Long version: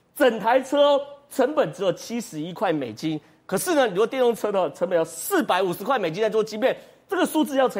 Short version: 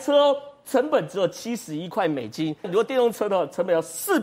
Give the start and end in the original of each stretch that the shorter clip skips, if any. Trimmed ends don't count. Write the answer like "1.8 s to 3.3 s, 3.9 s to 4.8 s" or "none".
3.3 s to 3.9 s